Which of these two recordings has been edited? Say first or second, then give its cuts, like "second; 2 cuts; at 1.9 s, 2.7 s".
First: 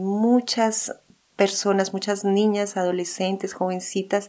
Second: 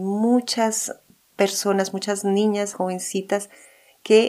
second; 1 cut; at 2.7 s